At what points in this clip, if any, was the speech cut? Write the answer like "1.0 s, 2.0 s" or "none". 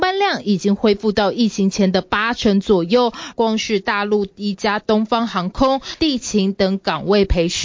3.3 s, 6.0 s